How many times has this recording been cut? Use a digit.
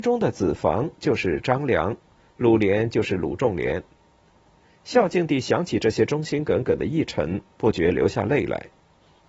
0